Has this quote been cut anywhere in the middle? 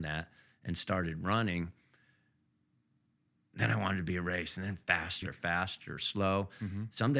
yes; 1 cut; at 5.2 s

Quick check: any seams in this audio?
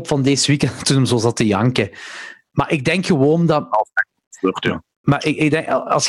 no; 0 cuts

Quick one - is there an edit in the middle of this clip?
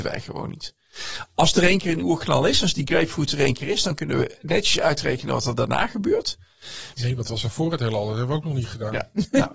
yes; 1 cut; at 7.0 s

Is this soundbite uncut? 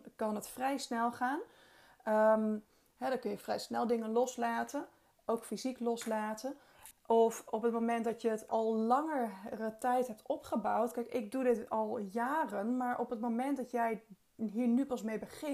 no; 2 cuts; at 6.9 s, 8.5 s

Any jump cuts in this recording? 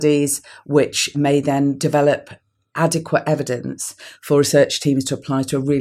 no; 0 cuts

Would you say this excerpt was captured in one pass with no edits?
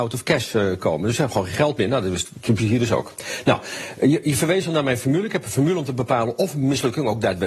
yes; 0 cuts

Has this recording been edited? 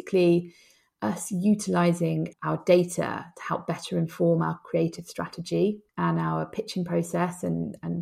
yes; 2 cuts; at 2.3 s, 5.9 s

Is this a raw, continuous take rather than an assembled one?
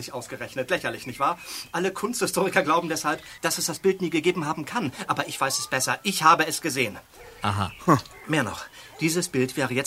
no; 1 cut; at 3.4 s

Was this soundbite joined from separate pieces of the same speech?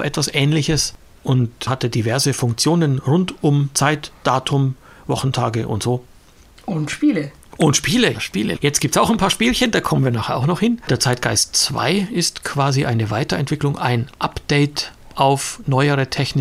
yes; 1 cut; at 8.1 s

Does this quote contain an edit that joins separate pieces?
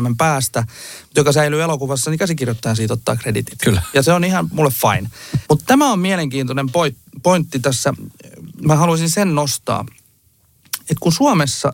yes; 1 cut; at 5.4 s

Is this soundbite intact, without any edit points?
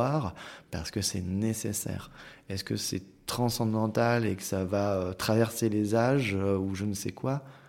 yes; 0 cuts

